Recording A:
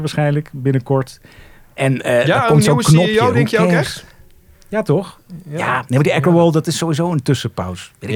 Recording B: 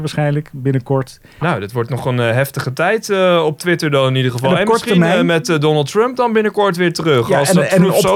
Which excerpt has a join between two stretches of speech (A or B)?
B